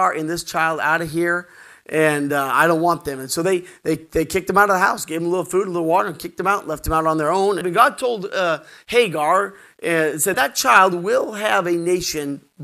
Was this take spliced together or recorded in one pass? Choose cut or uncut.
cut